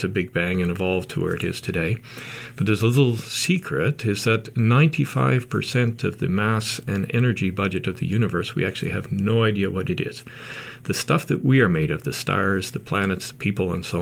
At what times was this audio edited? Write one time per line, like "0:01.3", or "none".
none